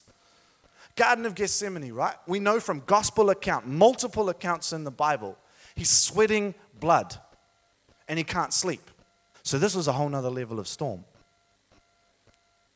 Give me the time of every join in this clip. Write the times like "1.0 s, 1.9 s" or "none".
9.3 s